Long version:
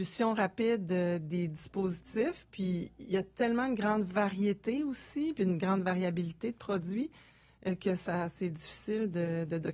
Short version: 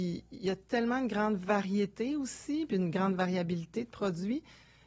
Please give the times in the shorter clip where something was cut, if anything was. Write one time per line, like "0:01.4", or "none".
none